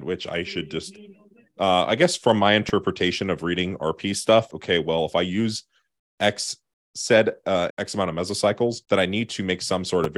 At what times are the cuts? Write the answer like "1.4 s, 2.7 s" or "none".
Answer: 4.5 s, 7.7 s, 8.8 s